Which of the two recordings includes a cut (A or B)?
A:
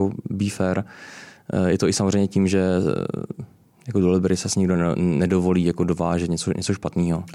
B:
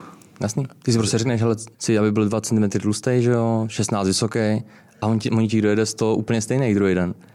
B